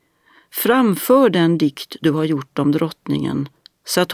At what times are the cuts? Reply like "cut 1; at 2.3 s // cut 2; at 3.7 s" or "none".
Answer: none